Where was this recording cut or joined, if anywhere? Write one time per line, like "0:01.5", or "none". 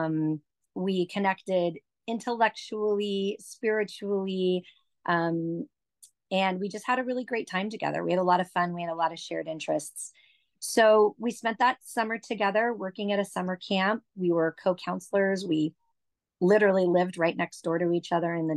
none